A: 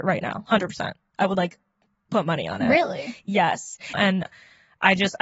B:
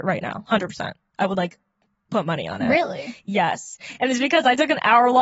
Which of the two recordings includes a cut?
A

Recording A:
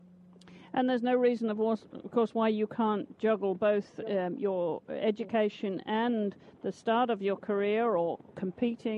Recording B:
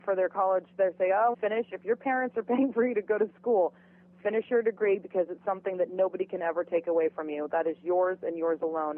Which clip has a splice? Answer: B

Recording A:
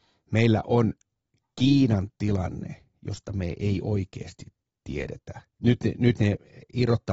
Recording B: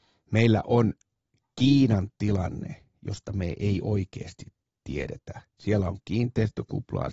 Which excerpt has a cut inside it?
A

